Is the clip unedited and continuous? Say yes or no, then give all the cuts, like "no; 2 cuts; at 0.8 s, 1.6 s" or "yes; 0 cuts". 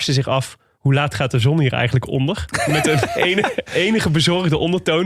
no; 1 cut; at 3.7 s